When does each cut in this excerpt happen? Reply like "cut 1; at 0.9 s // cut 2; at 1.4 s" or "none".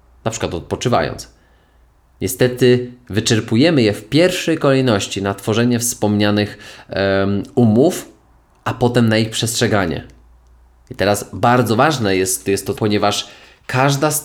cut 1; at 12.8 s

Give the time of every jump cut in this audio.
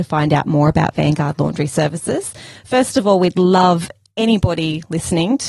none

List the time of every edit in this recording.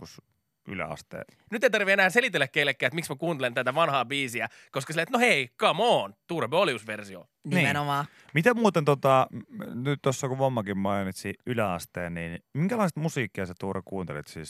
cut 1; at 1.5 s

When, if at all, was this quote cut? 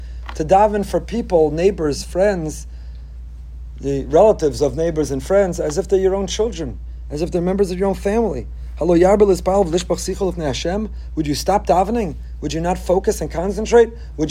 none

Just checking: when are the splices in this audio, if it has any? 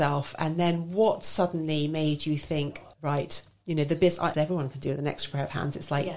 cut 1; at 2.9 s // cut 2; at 4.3 s

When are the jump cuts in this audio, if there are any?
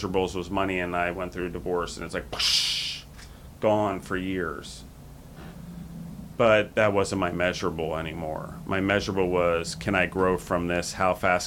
none

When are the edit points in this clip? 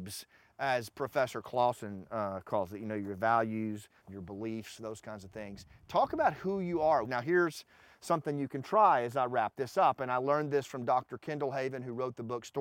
cut 1; at 4.0 s // cut 2; at 7.0 s

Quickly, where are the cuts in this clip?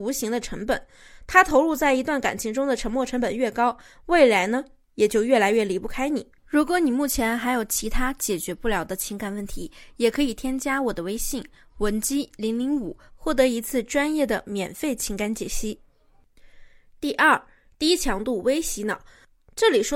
cut 1; at 13.1 s

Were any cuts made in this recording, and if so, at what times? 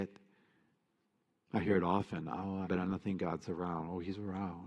cut 1; at 2.6 s

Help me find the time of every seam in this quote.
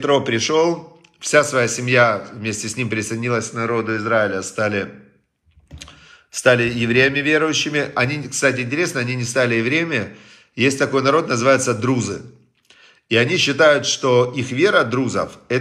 none

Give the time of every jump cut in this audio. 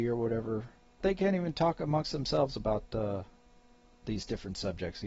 cut 1; at 1.0 s

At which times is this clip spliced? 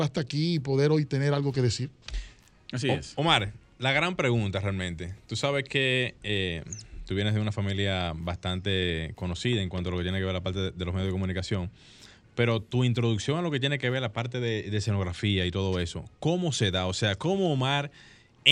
none

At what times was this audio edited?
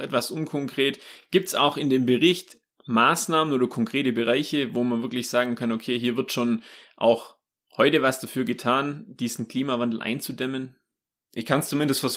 none

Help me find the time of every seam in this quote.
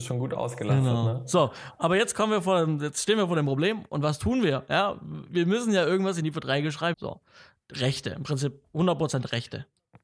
cut 1; at 6.9 s

